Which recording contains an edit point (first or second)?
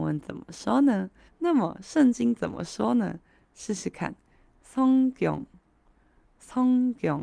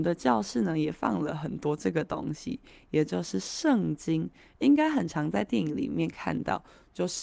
first